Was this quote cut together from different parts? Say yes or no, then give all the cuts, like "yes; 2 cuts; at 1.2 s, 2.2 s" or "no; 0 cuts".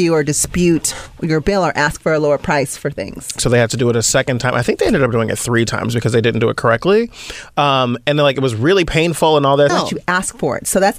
yes; 2 cuts; at 3.4 s, 9.7 s